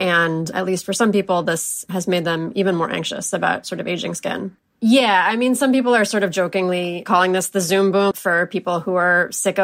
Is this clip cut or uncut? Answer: cut